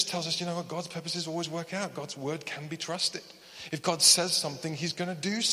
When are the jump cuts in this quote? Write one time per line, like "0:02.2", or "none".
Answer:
none